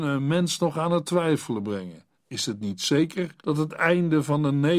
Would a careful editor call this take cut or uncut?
cut